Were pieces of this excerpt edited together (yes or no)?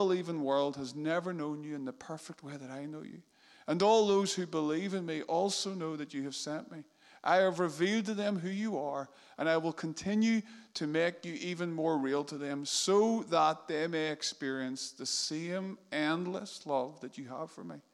no